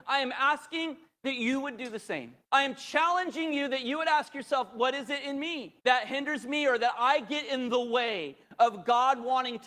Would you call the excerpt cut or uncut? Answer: cut